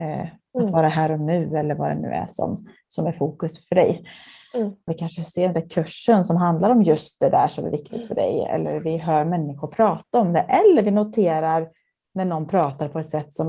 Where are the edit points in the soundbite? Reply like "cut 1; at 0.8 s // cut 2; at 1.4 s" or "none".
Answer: cut 1; at 4.9 s